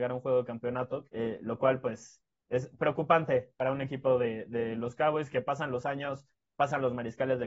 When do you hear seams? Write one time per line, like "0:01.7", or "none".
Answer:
0:01.0

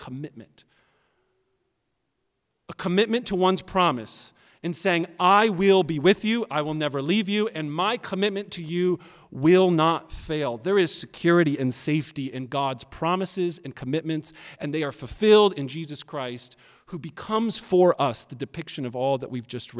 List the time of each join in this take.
none

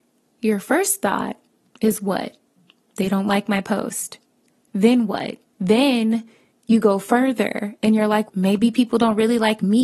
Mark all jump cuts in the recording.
0:05.5
0:08.3

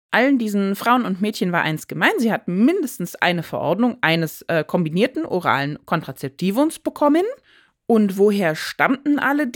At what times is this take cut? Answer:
none

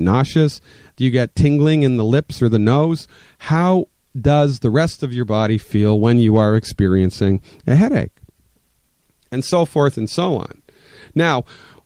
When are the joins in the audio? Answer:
none

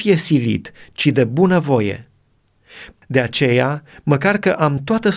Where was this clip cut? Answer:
0:02.9

